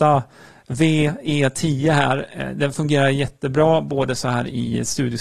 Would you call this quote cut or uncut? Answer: uncut